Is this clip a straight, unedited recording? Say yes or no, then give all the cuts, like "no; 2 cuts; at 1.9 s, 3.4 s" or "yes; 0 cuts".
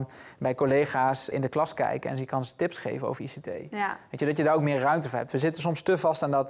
no; 1 cut; at 1.3 s